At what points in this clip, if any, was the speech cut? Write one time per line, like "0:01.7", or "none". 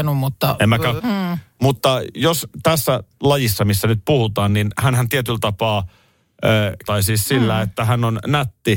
0:01.0
0:06.9